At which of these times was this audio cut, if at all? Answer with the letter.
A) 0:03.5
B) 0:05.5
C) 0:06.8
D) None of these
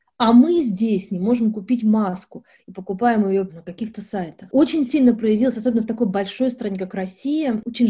A